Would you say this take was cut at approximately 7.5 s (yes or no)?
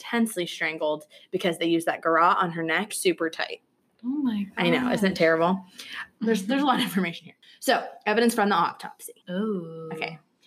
no